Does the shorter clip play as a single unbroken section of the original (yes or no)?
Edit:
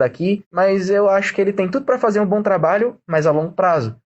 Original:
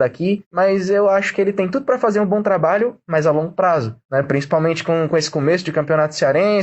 yes